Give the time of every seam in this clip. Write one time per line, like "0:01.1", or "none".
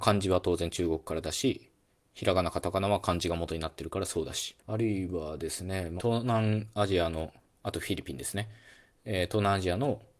0:04.6
0:06.0